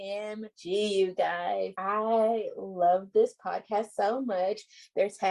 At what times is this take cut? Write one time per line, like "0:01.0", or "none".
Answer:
none